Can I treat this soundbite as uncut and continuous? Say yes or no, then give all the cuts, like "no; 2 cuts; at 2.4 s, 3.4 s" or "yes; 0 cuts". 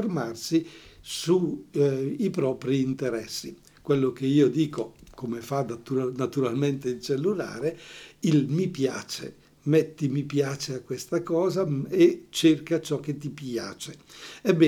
yes; 0 cuts